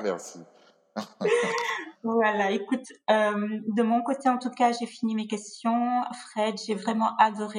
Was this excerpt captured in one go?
yes; 0 cuts

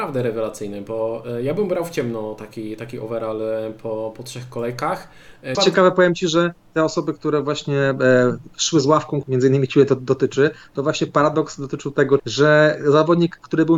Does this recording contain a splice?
yes; 3 cuts; at 5.5 s, 9.2 s, 12.2 s

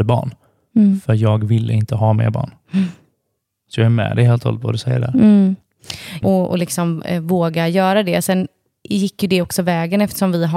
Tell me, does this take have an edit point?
yes; 1 cut; at 6.2 s

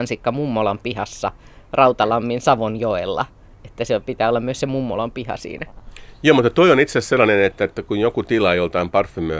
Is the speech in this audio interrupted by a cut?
no; 0 cuts

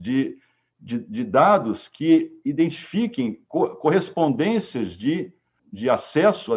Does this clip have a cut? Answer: yes; 1 cut; at 5.6 s

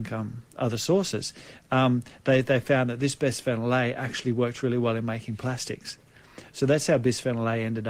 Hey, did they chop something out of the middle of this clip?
no; 0 cuts

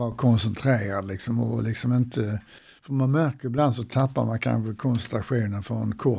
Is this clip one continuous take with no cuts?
yes; 0 cuts

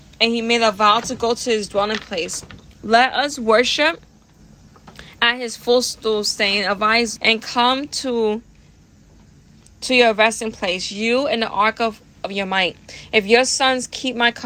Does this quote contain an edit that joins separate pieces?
yes; 1 cut; at 7.2 s

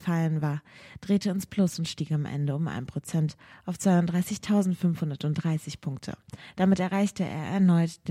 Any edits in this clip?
no; 0 cuts

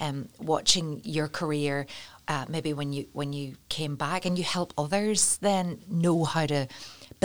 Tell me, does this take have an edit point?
no; 0 cuts

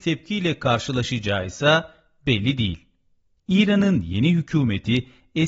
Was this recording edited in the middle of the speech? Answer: yes; 1 cut; at 3.4 s

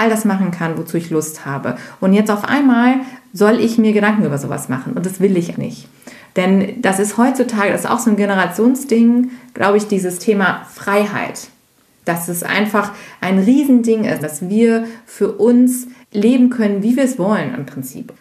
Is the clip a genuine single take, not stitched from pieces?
no; 3 cuts; at 5.5 s, 14.2 s, 16.0 s

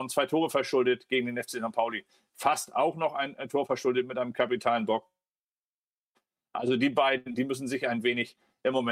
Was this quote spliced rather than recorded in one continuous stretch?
no; 0 cuts

